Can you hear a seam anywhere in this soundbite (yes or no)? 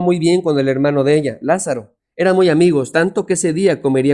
no